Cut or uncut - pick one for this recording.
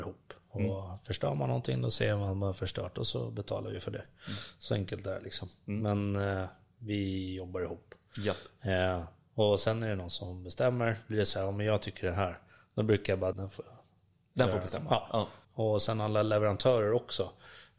cut